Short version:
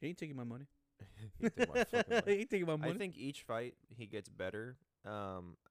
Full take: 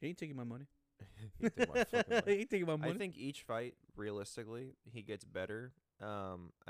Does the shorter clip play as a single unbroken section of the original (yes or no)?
no